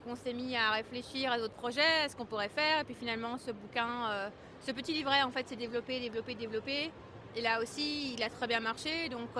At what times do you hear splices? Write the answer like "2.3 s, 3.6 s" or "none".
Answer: 7.3 s